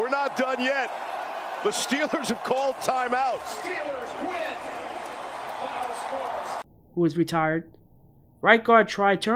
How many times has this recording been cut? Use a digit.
1